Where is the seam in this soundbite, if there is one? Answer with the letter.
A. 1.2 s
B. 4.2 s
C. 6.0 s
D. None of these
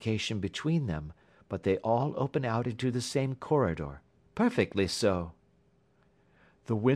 B